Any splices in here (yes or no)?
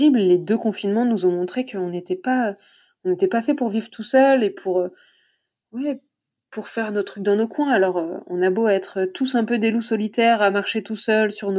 no